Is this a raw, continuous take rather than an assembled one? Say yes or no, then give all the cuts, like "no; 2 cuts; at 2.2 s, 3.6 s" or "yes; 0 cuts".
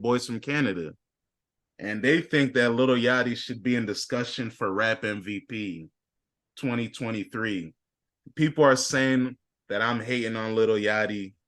yes; 0 cuts